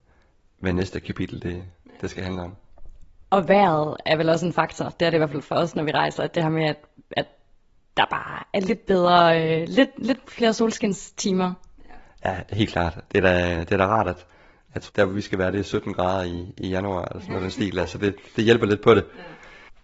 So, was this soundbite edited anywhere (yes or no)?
yes